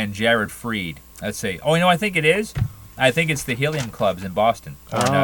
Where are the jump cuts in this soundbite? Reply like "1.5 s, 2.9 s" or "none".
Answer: 1.1 s